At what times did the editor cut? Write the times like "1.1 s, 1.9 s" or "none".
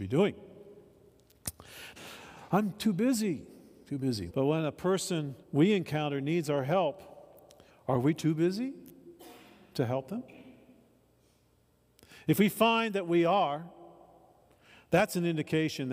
2.0 s, 4.3 s, 5.4 s